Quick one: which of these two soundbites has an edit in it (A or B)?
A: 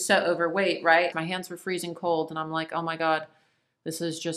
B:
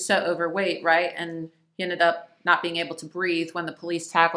A